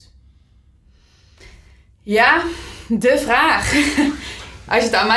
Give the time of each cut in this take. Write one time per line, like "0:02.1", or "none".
none